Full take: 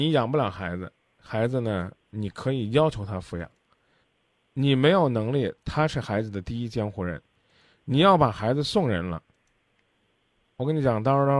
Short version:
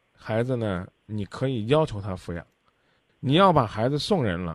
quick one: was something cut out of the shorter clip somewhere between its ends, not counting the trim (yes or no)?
yes